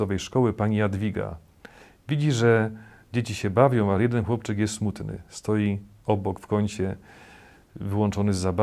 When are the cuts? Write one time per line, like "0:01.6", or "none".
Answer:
none